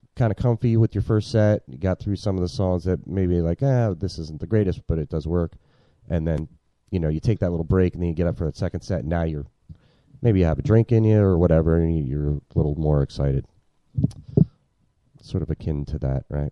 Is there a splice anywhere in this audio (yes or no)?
no